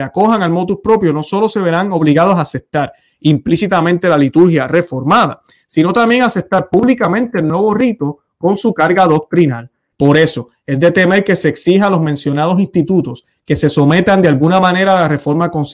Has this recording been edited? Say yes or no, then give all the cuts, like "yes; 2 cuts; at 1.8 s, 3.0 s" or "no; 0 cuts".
yes; 1 cut; at 9.9 s